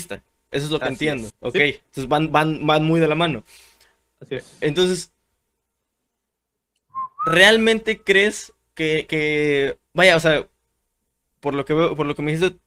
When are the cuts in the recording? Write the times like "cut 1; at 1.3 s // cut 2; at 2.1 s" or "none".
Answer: cut 1; at 1.3 s // cut 2; at 9.9 s

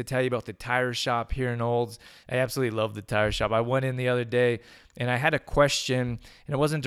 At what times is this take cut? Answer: cut 1; at 2.2 s

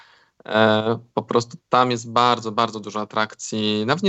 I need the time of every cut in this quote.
none

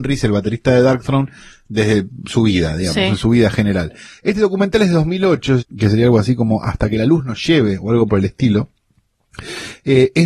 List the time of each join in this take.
cut 1; at 4.2 s // cut 2; at 5.6 s

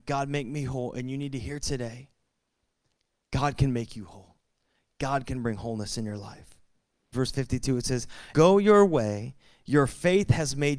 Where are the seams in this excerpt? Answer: cut 1; at 7.1 s // cut 2; at 8.3 s

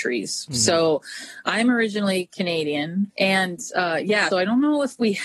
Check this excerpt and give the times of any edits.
cut 1; at 3.1 s // cut 2; at 4.3 s

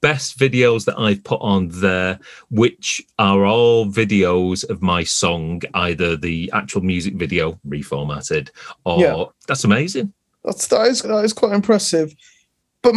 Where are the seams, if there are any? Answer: cut 1; at 9.3 s // cut 2; at 11.0 s

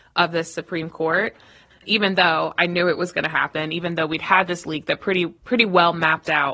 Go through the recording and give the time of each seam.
cut 1; at 1.7 s

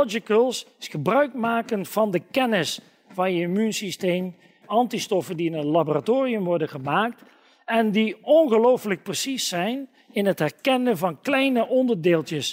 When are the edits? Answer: cut 1; at 4.6 s

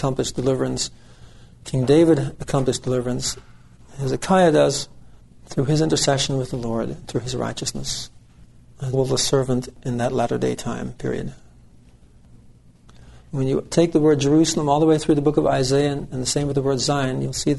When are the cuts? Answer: cut 1; at 8.9 s // cut 2; at 13.3 s

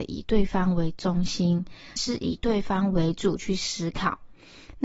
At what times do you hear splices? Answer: cut 1; at 2.0 s

